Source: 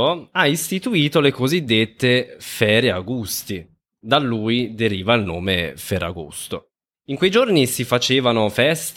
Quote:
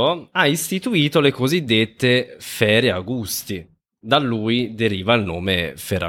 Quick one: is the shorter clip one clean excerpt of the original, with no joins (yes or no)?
yes